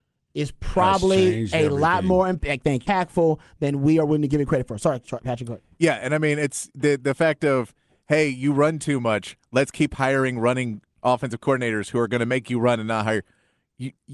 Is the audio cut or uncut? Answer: cut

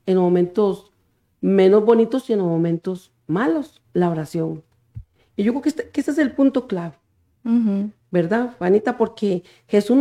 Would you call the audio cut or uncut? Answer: cut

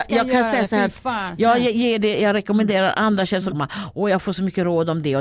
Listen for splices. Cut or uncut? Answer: cut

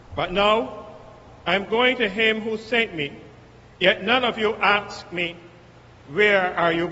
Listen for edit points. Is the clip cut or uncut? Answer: uncut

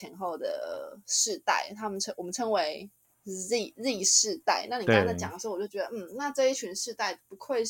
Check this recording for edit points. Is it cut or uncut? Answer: uncut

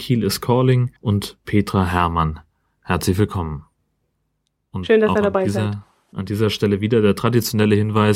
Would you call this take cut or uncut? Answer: cut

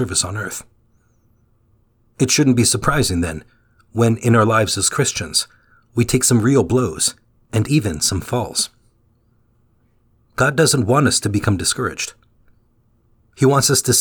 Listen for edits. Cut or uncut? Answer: uncut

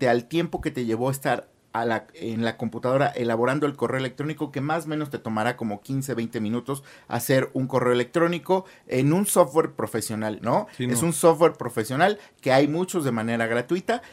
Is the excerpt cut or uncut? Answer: cut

